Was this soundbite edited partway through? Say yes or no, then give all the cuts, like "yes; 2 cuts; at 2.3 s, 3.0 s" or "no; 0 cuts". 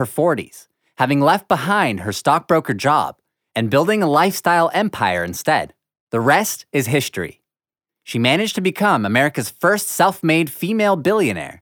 no; 0 cuts